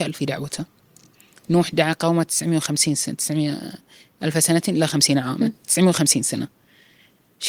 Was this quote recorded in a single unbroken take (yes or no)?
yes